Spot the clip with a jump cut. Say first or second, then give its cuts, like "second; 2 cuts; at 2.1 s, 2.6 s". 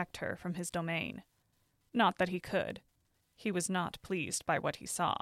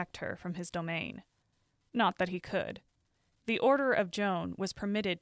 first; 1 cut; at 3.2 s